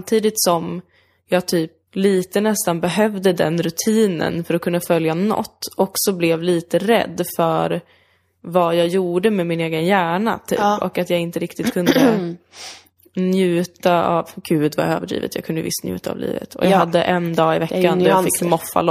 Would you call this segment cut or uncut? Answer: cut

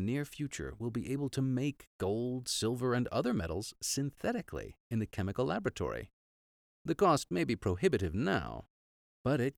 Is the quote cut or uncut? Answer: uncut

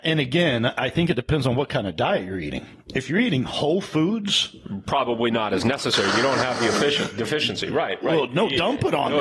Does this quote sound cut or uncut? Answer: uncut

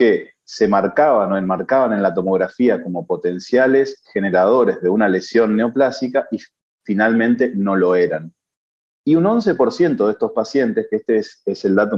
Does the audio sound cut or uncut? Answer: uncut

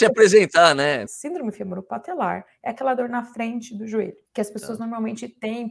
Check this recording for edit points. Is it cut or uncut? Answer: cut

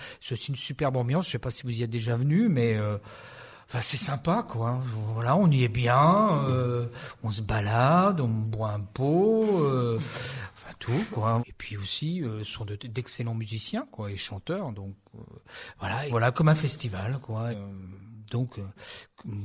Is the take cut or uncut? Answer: cut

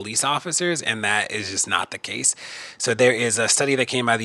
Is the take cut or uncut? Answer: uncut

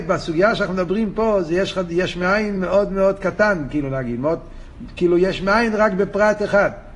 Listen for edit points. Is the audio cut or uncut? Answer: uncut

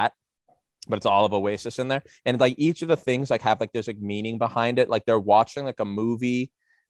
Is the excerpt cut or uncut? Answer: uncut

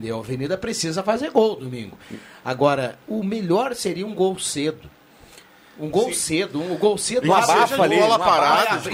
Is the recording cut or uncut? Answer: uncut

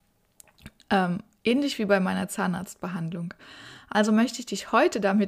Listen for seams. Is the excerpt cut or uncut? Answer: uncut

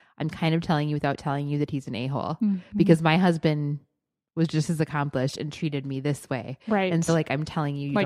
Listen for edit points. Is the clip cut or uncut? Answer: uncut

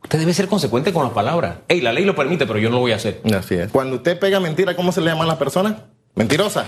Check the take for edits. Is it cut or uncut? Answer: cut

